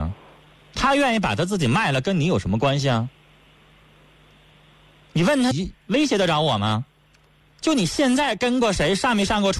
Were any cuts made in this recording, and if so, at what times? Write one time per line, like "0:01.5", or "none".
0:05.5